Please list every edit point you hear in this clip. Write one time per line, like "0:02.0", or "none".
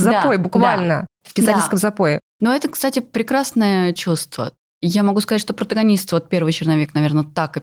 none